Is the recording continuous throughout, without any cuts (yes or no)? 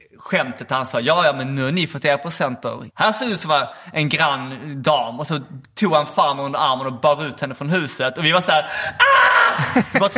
no